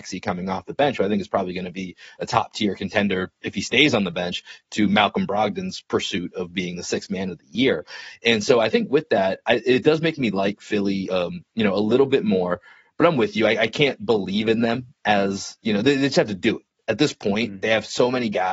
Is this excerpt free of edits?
yes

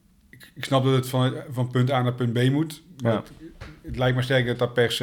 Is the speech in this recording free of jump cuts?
yes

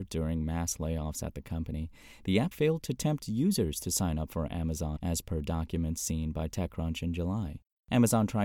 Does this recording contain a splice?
yes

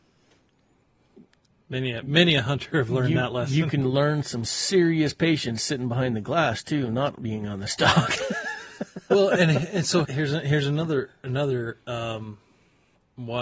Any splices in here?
yes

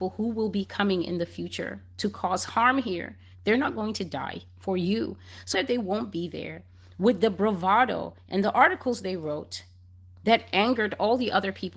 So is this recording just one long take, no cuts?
no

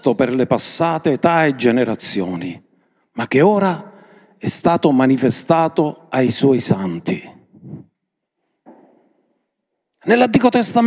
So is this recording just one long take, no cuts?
yes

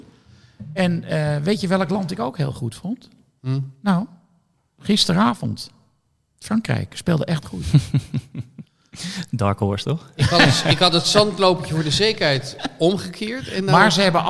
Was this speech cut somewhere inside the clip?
no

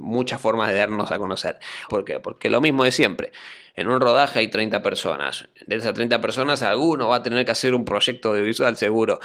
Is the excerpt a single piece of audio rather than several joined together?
no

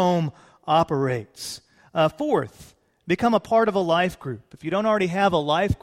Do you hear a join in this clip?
no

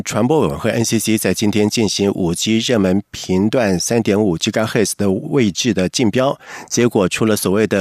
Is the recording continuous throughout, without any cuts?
yes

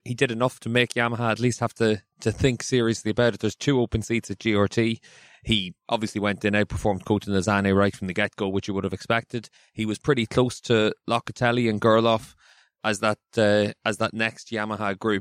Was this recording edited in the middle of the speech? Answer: no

